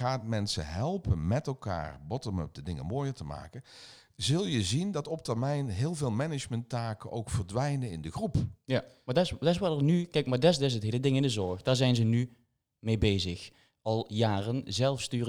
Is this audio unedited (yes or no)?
yes